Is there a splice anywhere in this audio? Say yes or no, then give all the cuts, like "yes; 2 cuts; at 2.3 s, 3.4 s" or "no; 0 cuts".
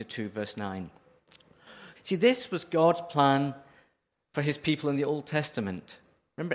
yes; 1 cut; at 2.0 s